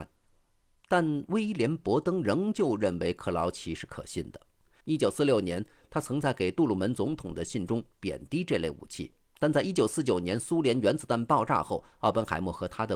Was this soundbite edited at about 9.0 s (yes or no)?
no